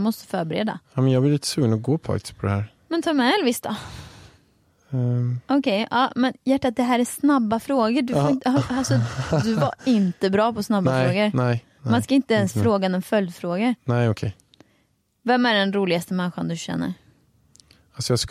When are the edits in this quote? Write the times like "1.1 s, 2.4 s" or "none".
none